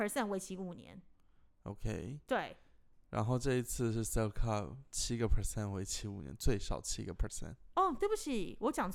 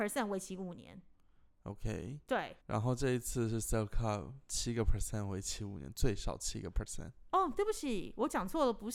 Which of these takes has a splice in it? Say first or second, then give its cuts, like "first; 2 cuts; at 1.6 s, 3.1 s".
second; 1 cut; at 2.6 s